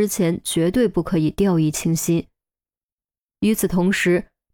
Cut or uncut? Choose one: uncut